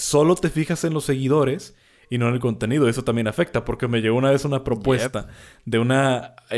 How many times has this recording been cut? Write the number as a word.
zero